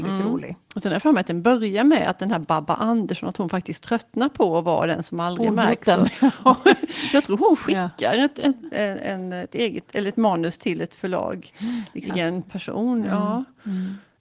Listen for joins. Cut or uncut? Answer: cut